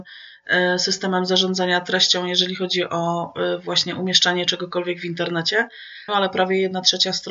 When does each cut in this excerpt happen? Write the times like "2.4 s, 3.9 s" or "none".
6.1 s